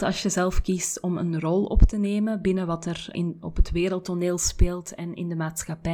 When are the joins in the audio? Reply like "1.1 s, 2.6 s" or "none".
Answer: 3.1 s